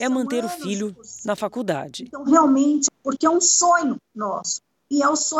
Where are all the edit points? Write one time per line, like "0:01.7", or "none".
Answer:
0:02.9